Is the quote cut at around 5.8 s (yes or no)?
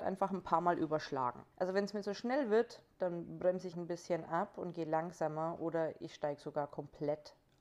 no